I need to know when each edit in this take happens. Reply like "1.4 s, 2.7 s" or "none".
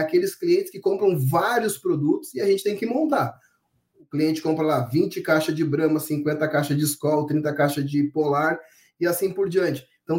none